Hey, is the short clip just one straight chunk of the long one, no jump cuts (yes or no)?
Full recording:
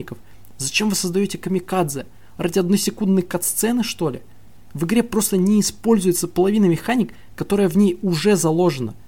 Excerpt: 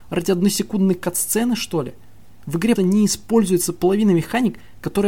no